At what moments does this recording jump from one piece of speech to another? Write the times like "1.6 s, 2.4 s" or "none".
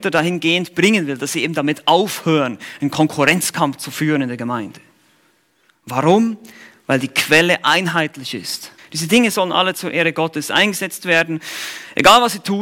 8.8 s